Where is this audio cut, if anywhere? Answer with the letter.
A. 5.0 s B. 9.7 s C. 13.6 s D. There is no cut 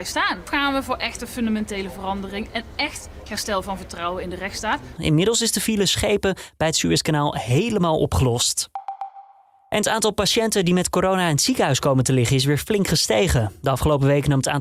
A